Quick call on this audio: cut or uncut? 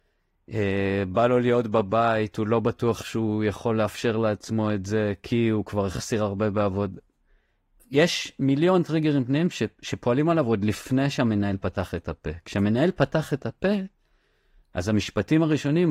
uncut